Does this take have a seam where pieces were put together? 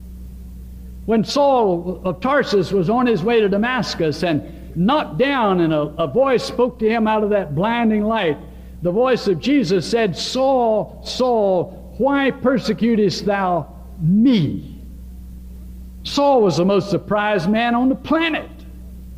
no; 0 cuts

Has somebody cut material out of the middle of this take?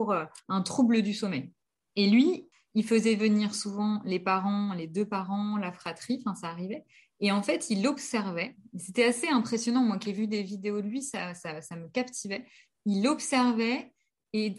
no; 0 cuts

